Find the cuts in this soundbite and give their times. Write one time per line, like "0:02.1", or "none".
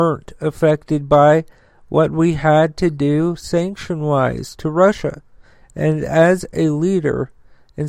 none